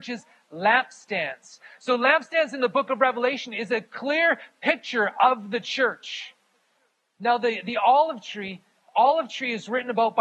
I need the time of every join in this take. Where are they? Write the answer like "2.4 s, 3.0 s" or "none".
none